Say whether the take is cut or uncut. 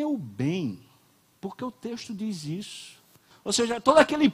cut